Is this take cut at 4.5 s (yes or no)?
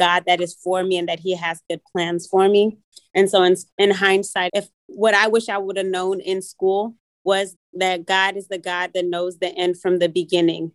yes